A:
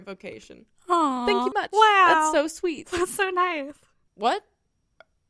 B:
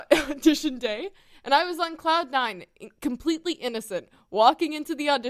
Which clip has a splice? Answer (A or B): A